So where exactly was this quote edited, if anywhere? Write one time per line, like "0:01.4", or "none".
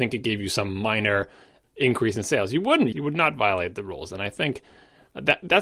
0:02.9